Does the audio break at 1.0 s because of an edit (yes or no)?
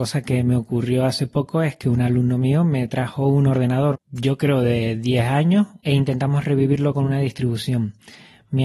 no